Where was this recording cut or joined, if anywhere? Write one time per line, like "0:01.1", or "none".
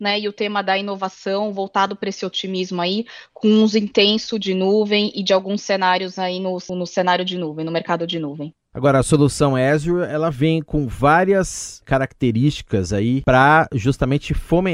0:06.7